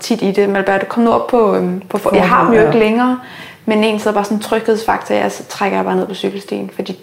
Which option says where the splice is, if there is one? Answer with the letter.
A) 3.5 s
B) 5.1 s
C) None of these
C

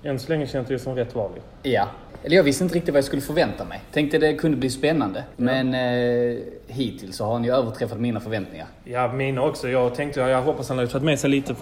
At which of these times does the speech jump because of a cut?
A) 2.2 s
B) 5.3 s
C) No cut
B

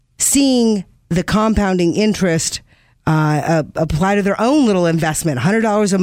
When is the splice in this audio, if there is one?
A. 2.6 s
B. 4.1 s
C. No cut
C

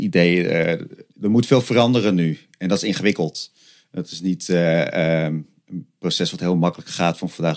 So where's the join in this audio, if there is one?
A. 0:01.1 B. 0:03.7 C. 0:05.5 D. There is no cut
D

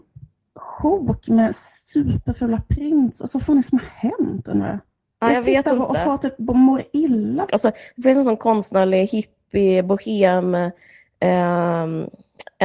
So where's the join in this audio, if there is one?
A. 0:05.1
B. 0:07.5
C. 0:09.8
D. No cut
B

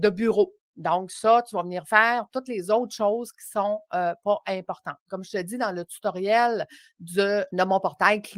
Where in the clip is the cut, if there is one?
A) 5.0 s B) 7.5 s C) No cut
B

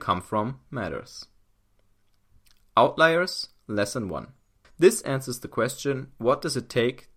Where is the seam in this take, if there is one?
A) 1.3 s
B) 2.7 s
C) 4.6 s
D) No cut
C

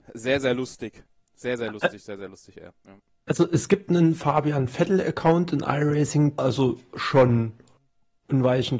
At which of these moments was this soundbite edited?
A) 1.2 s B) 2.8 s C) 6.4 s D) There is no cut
C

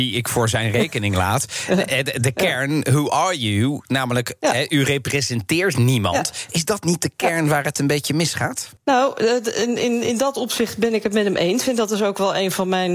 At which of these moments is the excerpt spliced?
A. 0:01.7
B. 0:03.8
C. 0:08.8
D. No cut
C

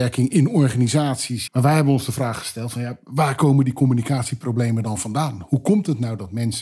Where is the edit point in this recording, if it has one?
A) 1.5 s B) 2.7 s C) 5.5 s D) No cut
A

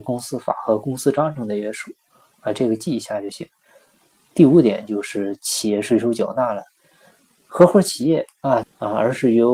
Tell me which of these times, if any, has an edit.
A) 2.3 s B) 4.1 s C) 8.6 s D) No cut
C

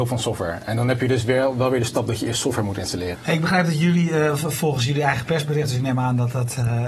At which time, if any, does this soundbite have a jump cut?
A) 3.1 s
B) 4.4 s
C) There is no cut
A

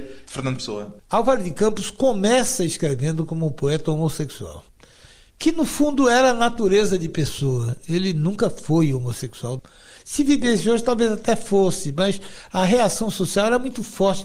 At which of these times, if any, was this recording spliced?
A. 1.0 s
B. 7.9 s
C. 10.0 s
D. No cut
A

